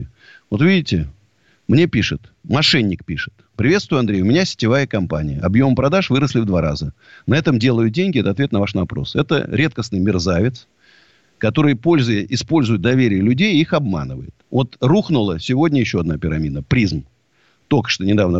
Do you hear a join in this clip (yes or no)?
yes